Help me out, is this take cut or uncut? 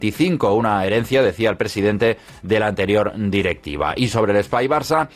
uncut